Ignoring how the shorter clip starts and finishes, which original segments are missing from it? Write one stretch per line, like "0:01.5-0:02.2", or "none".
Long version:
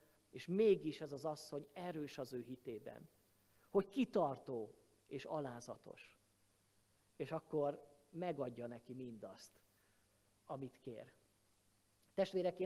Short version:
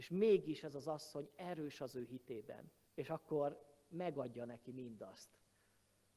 0:03.2-0:07.1